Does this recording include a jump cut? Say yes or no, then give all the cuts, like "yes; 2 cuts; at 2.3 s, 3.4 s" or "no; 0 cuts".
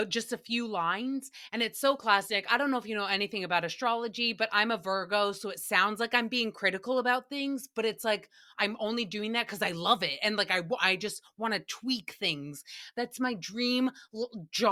no; 0 cuts